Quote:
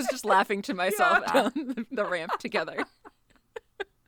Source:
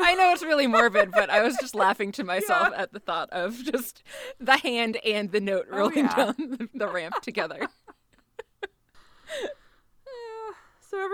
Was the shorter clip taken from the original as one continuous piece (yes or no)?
no